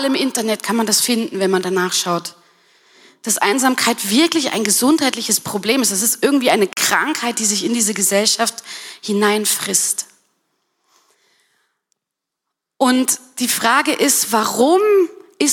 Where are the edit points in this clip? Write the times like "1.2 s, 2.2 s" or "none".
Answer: none